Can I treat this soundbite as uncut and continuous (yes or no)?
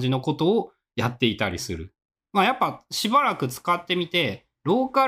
no